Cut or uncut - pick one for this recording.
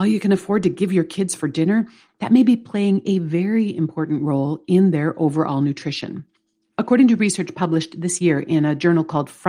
uncut